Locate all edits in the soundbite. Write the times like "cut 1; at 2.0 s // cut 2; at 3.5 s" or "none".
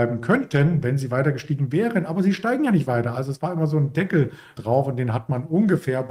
cut 1; at 4.6 s